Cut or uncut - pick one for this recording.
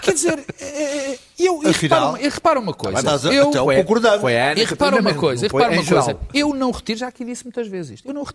uncut